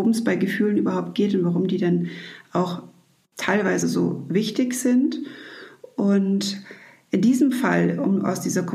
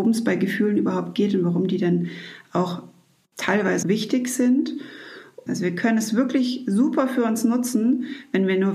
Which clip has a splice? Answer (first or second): second